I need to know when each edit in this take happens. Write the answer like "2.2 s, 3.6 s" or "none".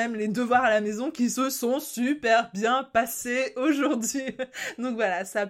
none